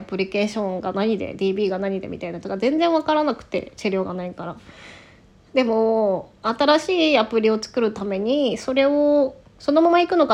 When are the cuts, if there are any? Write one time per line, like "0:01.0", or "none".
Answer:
none